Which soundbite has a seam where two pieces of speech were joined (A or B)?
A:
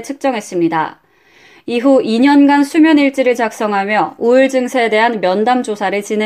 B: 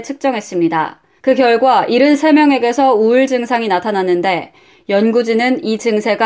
B